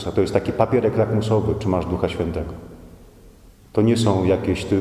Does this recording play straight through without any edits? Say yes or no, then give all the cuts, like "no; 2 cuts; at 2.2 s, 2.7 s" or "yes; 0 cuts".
no; 1 cut; at 3.6 s